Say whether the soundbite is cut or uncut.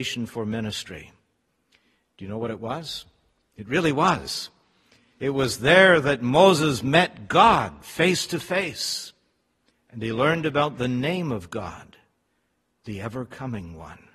cut